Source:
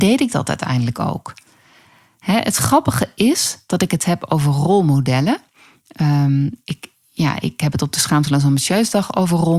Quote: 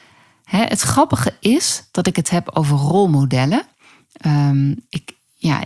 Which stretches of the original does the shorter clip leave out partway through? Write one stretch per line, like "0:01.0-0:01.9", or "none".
none